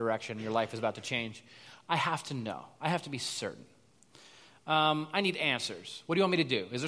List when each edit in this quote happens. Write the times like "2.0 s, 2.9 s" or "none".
1.9 s